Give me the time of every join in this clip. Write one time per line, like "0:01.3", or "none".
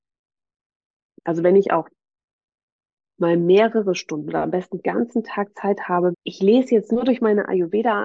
0:01.2
0:06.1